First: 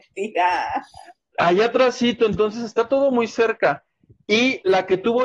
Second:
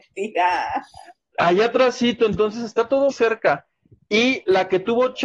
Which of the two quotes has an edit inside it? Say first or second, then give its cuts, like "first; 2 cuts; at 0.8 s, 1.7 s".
second; 1 cut; at 3.1 s